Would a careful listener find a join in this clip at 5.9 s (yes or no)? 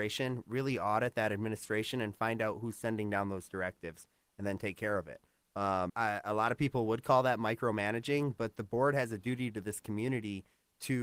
yes